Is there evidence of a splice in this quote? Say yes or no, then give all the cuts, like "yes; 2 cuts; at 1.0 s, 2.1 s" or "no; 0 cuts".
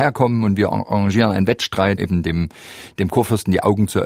yes; 1 cut; at 2.0 s